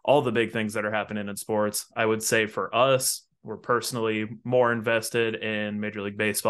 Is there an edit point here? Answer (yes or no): no